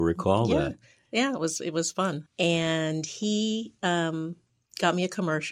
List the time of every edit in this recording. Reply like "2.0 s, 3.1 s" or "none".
2.3 s